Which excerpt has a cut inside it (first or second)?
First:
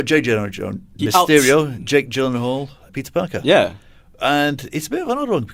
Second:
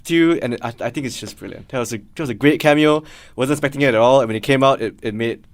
first